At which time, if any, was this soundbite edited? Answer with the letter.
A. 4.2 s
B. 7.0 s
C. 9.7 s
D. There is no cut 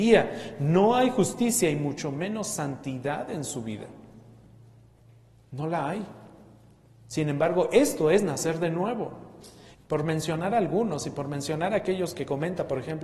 C